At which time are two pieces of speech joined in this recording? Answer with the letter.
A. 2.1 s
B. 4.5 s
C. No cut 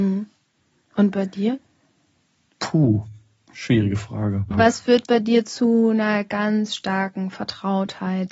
B